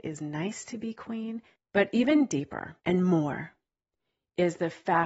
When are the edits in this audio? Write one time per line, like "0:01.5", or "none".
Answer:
0:01.6
0:02.8